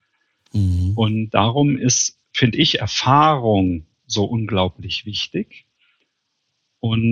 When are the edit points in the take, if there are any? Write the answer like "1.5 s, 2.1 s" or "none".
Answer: none

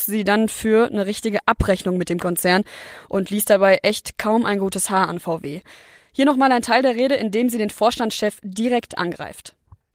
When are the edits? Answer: none

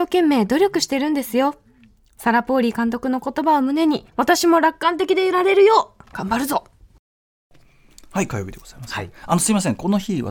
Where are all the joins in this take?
4.1 s

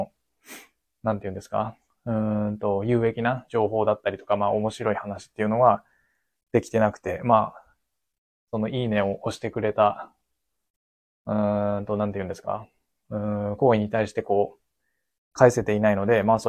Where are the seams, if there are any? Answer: none

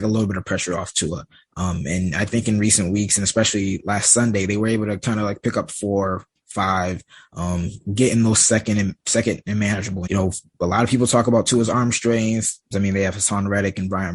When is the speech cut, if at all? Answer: 10.1 s, 12.7 s

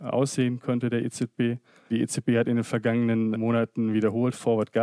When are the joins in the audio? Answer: 3.3 s

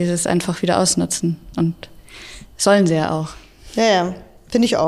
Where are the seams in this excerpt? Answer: none

